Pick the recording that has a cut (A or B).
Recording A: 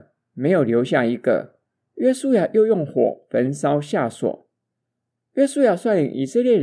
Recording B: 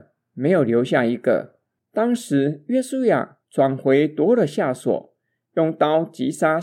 B